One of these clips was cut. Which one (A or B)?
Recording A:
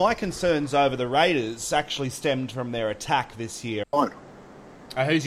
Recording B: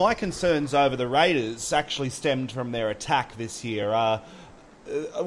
A